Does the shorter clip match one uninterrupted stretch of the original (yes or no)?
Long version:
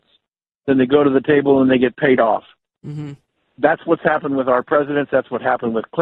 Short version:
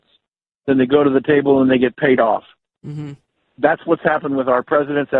yes